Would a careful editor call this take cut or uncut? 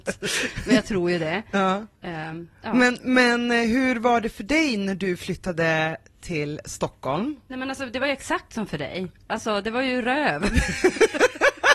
uncut